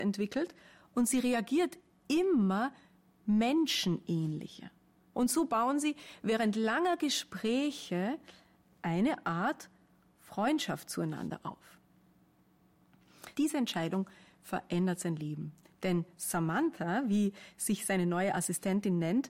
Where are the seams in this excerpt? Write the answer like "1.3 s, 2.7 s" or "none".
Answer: 5.1 s, 13.3 s